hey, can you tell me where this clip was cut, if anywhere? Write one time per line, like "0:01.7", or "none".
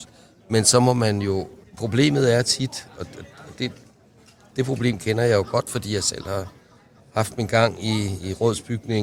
0:01.6